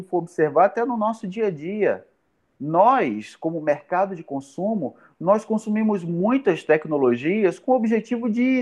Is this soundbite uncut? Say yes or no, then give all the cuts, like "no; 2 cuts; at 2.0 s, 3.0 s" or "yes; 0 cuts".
yes; 0 cuts